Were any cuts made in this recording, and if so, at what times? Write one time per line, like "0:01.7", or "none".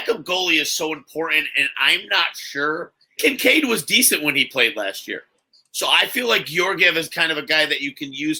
0:03.2